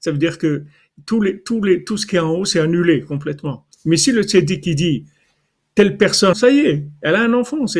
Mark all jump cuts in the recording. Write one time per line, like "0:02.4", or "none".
0:03.7
0:06.3